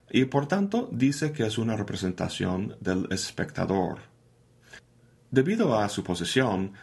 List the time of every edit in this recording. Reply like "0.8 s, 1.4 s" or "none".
none